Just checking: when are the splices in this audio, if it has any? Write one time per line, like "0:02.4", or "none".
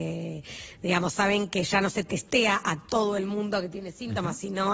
none

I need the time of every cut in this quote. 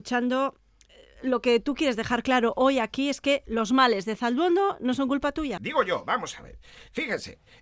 0:05.6

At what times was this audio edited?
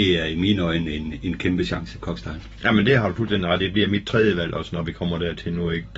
none

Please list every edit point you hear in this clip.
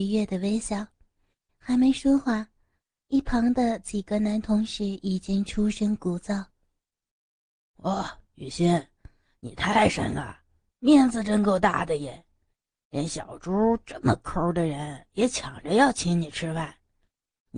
none

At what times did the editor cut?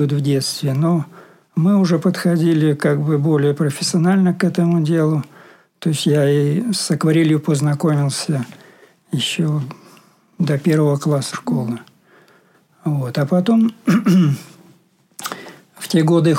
0:11.3

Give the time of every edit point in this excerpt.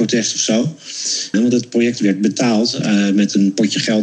0:01.3

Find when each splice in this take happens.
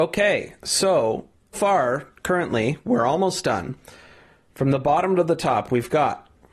0:01.5

